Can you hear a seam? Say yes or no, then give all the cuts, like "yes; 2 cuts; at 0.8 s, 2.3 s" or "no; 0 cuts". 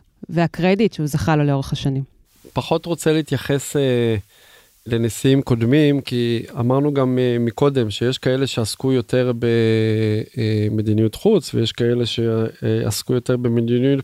no; 0 cuts